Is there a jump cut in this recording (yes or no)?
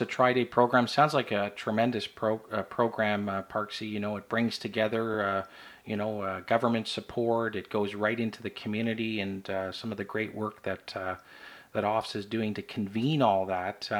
no